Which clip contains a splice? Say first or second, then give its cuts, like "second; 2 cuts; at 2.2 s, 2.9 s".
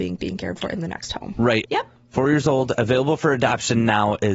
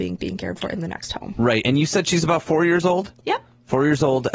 first; 1 cut; at 1.6 s